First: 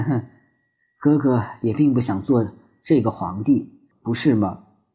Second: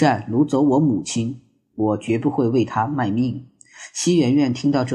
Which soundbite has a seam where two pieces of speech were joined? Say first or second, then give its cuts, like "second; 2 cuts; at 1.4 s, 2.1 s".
first; 1 cut; at 3.9 s